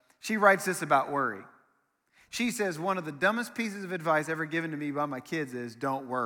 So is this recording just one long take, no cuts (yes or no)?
yes